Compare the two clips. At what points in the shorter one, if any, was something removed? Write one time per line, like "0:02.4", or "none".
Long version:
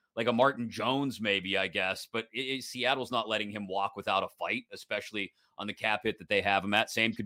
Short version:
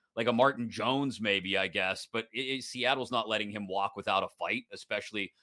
none